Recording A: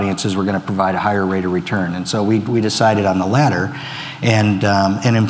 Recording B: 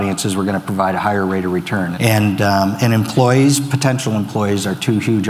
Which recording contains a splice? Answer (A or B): B